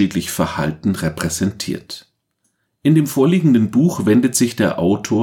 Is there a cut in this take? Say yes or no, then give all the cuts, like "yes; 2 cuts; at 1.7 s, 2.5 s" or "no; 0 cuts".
yes; 1 cut; at 2.7 s